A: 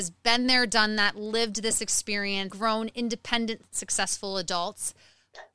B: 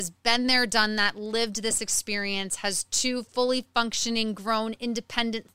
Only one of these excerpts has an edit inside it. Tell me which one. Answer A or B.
A